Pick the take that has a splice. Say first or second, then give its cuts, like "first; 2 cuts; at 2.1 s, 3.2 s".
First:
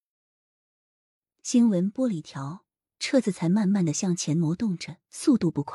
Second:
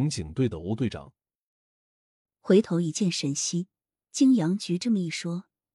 second; 1 cut; at 4.0 s